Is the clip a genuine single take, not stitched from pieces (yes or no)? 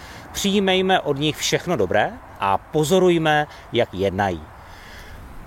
no